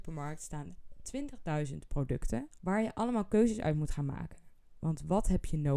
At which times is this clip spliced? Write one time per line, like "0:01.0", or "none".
0:02.6